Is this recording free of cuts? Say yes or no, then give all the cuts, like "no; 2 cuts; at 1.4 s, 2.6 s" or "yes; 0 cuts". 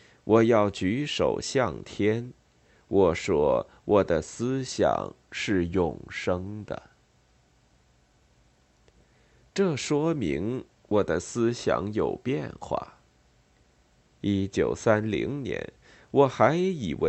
yes; 0 cuts